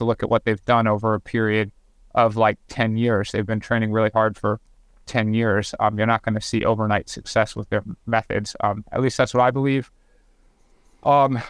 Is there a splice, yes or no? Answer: no